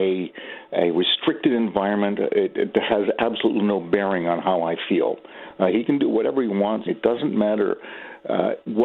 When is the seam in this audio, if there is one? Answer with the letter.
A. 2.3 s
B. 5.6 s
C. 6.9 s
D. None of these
C